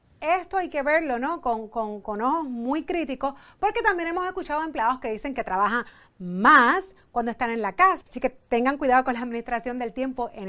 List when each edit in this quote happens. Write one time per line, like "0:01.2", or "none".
0:08.0